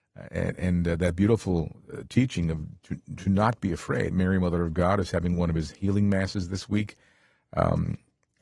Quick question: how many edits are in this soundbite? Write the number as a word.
one